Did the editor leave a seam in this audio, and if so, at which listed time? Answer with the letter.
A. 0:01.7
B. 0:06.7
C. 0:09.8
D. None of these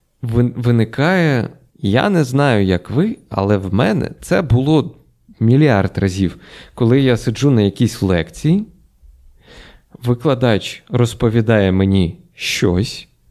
A